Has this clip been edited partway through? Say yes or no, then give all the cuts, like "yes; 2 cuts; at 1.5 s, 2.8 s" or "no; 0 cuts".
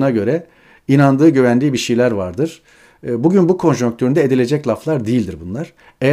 no; 0 cuts